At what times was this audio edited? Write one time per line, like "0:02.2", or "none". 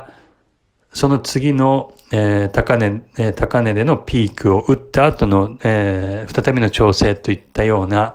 none